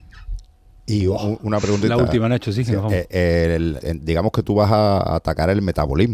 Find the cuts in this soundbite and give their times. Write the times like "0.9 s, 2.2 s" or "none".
3.8 s